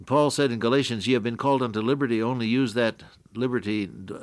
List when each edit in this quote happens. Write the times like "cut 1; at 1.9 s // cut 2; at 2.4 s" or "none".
none